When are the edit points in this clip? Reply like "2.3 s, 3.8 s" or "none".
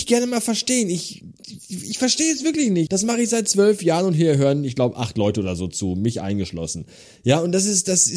2.9 s